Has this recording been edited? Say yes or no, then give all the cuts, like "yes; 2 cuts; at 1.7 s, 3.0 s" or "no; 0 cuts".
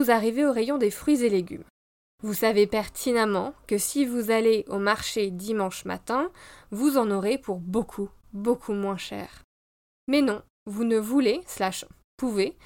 no; 0 cuts